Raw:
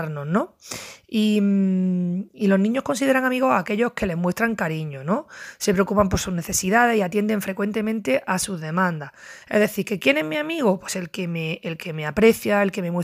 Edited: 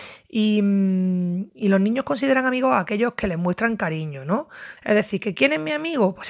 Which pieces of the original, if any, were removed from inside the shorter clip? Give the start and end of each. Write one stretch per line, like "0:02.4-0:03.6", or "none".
0:05.6-0:09.4